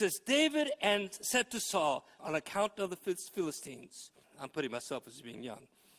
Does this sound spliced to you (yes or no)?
yes